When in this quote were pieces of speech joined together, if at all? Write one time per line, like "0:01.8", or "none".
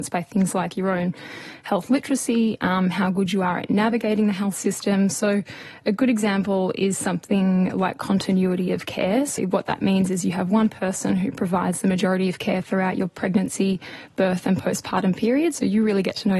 0:09.4